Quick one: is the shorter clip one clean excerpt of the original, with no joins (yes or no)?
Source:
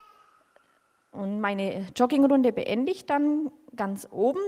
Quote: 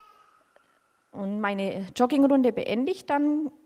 yes